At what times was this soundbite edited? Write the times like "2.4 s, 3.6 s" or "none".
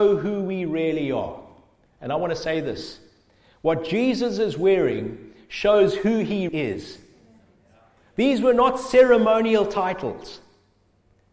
6.5 s